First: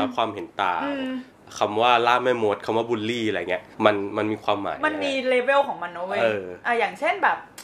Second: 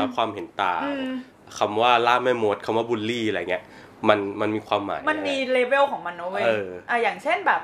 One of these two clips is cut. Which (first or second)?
first